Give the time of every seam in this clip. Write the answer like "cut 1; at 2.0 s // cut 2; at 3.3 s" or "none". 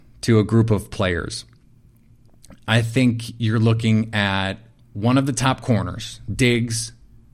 none